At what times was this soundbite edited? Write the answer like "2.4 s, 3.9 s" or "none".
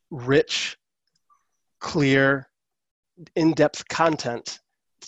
none